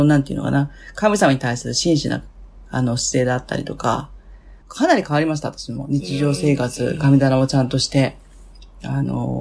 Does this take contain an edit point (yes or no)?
yes